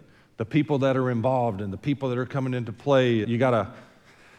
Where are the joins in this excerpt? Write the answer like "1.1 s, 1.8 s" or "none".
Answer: 3.2 s